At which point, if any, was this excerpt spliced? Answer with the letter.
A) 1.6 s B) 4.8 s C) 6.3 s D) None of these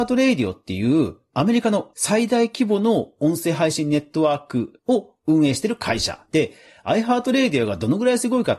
D